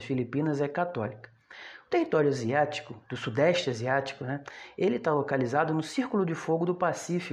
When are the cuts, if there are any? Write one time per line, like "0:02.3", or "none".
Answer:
none